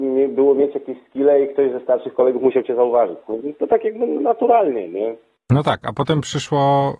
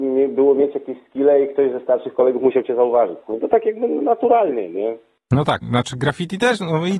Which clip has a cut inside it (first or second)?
second